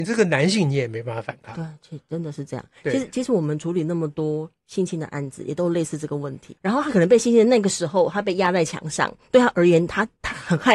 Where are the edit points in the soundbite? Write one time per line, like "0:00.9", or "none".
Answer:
0:06.6